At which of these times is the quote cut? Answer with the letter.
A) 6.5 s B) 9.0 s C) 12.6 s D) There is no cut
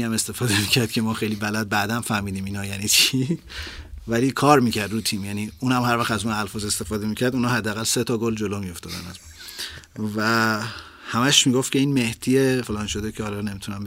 C